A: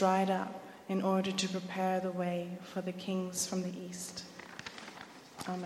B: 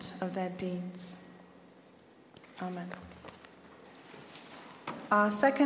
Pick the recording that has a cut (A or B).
B